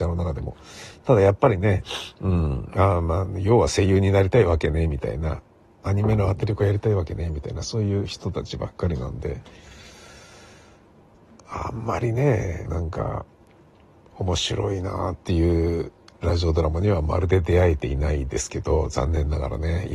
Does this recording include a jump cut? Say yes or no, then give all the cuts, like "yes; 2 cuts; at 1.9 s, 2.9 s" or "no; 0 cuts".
yes; 1 cut; at 12.7 s